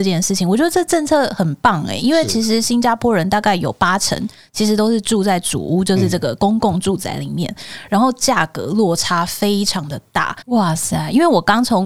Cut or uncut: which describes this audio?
cut